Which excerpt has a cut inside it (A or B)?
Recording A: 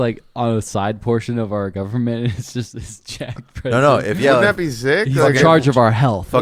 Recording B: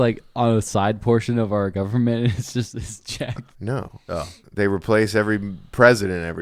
B